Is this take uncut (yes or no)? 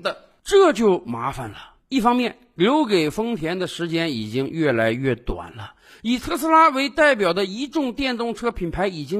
yes